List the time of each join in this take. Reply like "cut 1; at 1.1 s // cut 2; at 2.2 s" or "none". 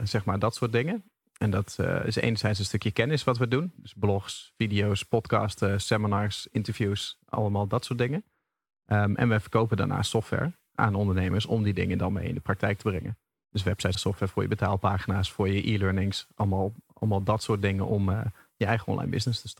cut 1; at 13.9 s